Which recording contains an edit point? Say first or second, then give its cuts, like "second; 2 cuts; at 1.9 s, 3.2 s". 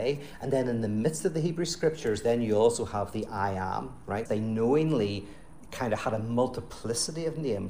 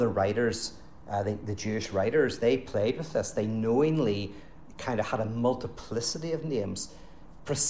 first; 1 cut; at 4.3 s